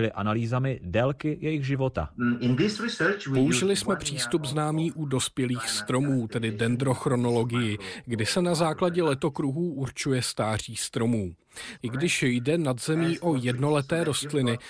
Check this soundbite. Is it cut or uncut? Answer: cut